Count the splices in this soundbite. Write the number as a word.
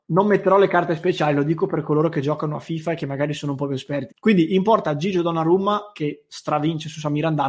one